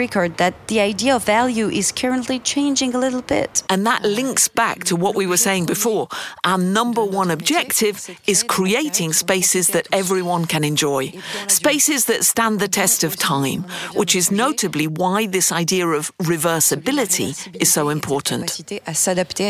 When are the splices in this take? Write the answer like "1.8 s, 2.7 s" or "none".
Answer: 3.7 s